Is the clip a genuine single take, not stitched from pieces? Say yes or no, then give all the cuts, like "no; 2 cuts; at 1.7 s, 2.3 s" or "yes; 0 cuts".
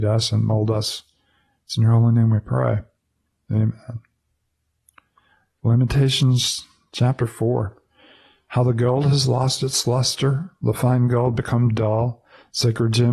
yes; 0 cuts